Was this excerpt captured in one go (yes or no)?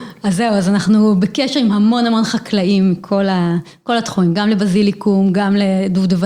yes